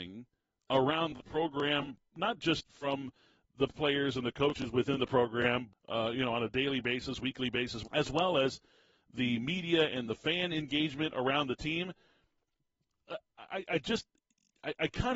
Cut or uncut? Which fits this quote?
cut